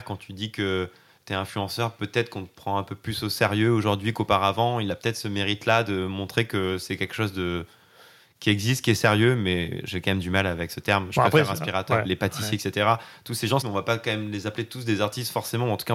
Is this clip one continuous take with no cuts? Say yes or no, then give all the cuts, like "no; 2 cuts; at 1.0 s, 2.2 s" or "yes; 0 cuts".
no; 2 cuts; at 12.0 s, 13.6 s